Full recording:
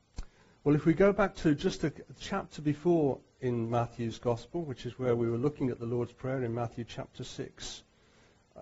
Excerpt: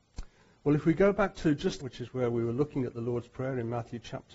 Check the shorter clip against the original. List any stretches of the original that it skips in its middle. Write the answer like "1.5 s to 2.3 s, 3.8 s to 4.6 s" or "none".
1.8 s to 4.7 s